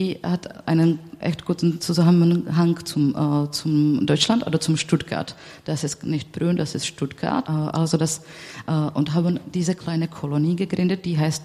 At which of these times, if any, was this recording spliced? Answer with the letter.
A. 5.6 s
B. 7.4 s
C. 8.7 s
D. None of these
B